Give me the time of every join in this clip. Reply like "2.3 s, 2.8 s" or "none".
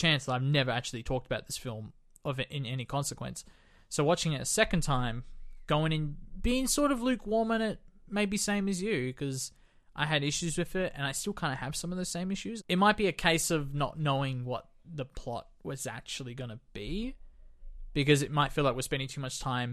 12.6 s

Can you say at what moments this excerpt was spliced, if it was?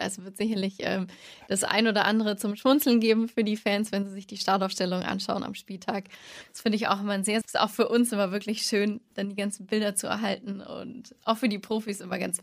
7.4 s

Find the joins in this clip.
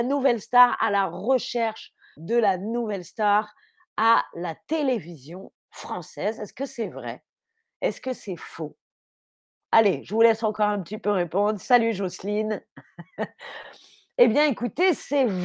2.2 s

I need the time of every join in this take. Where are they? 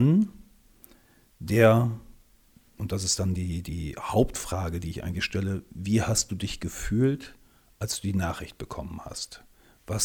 none

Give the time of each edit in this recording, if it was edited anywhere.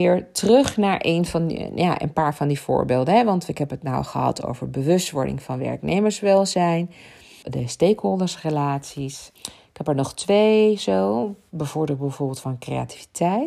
7.4 s, 9.4 s

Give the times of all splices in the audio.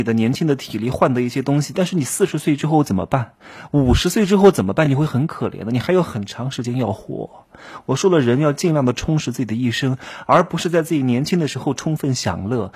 none

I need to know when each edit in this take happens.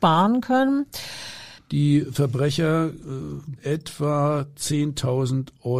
1.6 s, 3.6 s

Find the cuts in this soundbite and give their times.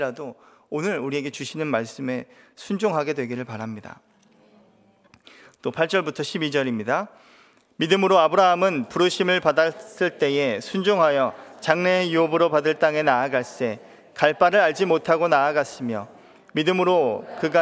none

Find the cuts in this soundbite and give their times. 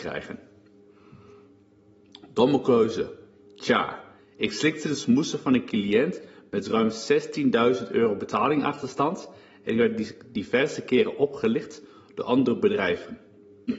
4.2 s

